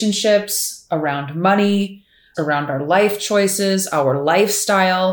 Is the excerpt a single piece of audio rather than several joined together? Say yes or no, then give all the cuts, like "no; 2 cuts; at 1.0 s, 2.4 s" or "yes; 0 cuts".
no; 1 cut; at 2.3 s